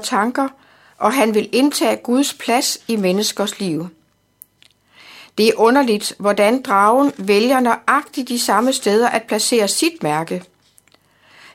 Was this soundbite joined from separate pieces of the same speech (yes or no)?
no